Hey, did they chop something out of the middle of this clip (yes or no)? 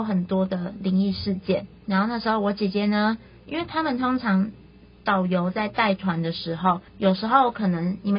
no